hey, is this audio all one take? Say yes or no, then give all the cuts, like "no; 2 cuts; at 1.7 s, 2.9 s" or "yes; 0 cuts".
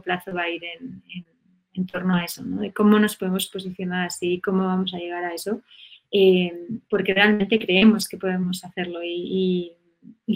yes; 0 cuts